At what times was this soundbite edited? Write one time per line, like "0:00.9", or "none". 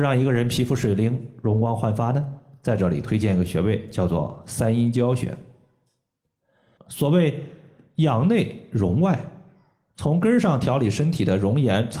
0:06.8